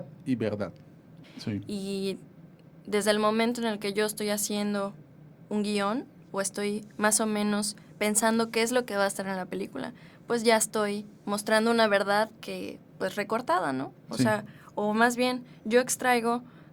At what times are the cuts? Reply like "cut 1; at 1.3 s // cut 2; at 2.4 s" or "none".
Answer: cut 1; at 1.2 s